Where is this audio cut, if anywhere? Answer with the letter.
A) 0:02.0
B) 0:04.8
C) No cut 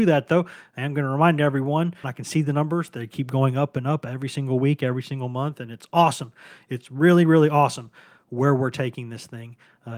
A